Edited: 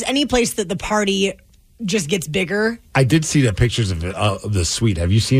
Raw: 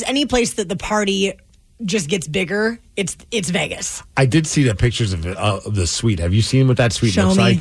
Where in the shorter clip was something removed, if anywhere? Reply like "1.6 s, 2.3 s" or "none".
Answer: 2.9 s